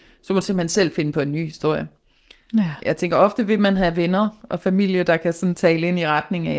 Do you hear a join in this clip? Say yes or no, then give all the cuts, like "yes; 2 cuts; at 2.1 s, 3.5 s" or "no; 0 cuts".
no; 0 cuts